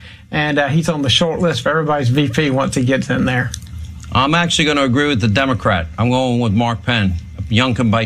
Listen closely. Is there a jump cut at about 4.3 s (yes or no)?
no